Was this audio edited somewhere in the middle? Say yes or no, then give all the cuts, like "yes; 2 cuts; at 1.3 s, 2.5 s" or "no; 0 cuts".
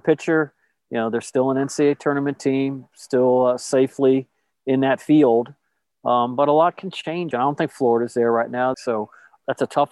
yes; 2 cuts; at 7.3 s, 8.7 s